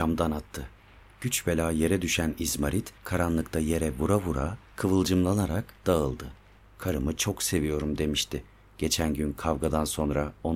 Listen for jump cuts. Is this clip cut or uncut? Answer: cut